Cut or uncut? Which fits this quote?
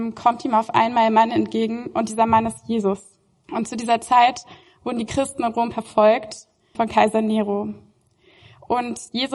cut